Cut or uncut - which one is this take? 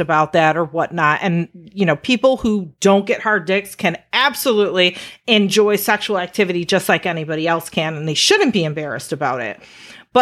uncut